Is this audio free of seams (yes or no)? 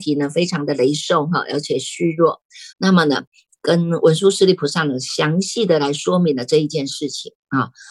no